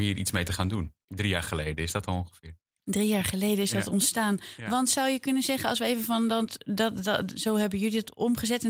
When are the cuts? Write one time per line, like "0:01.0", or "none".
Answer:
0:01.0